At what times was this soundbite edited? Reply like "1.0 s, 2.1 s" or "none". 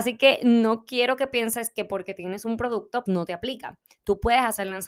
3.1 s